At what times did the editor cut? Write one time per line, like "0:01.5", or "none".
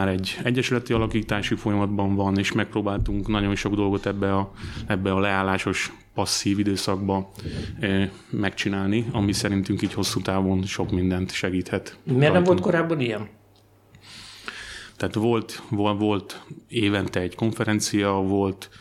0:15.0